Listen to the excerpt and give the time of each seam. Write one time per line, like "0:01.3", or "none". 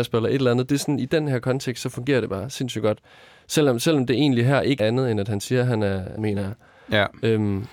0:04.8
0:06.2